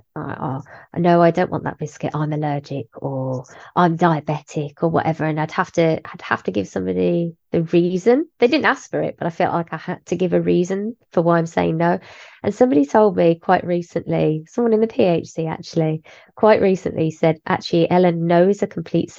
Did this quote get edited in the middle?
no; 0 cuts

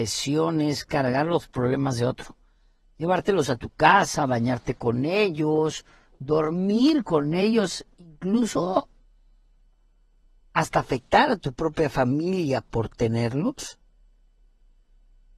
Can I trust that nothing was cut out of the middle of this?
yes; 0 cuts

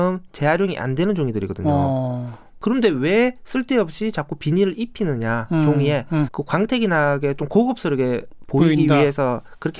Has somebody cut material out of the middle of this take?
yes; 1 cut; at 6.3 s

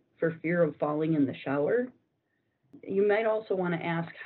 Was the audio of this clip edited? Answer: no; 0 cuts

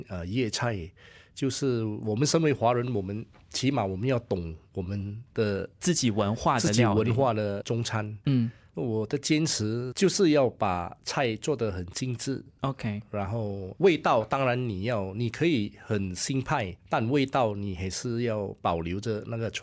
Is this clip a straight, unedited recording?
no; 1 cut; at 16.8 s

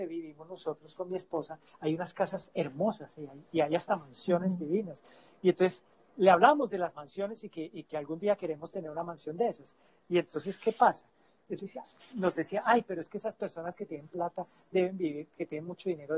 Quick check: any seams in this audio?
no; 0 cuts

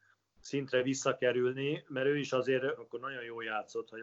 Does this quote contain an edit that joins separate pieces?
yes; 1 cut; at 2.8 s

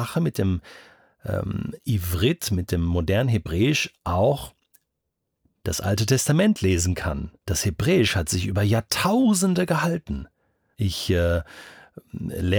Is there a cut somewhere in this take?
yes; 2 cuts; at 7.4 s, 10.7 s

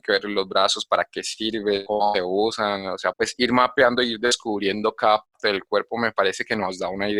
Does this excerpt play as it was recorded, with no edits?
no; 1 cut; at 3.1 s

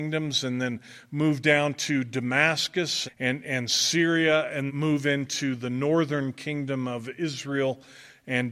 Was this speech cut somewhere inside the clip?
yes; 2 cuts; at 3.1 s, 4.7 s

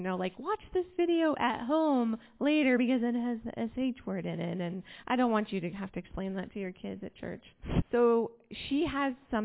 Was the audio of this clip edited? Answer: yes; 1 cut; at 7.8 s

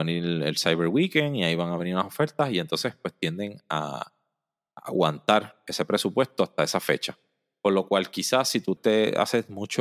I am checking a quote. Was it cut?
yes; 1 cut; at 8.8 s

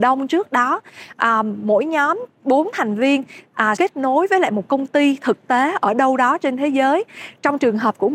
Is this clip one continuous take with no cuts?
no; 1 cut; at 3.8 s

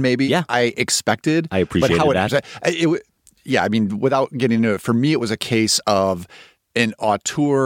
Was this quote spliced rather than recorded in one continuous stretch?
yes; 1 cut; at 2.3 s

